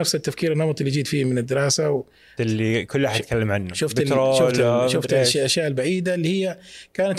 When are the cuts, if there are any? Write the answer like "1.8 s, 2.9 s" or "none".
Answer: 2.4 s